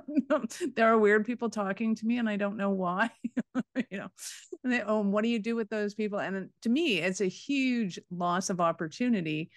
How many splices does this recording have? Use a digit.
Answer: 0